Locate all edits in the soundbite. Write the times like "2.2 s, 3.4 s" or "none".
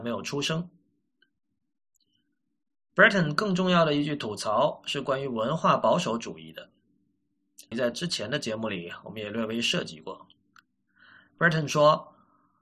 7.7 s